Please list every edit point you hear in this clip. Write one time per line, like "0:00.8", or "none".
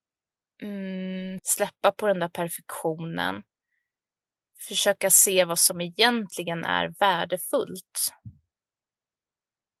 0:01.4